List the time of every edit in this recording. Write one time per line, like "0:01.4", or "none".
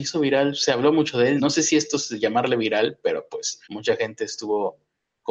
0:01.4
0:03.6